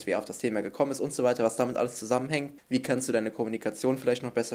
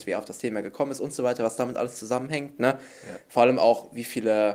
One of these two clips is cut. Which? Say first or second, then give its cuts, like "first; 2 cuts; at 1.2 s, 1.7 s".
first; 1 cut; at 2.6 s